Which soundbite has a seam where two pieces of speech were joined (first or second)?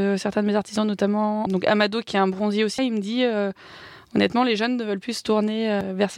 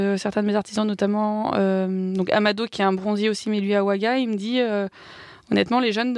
first